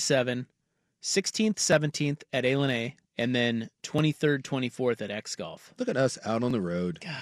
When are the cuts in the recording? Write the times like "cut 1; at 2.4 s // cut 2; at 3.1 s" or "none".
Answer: cut 1; at 3.0 s